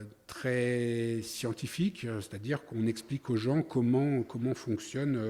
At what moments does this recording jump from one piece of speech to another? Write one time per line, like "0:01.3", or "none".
none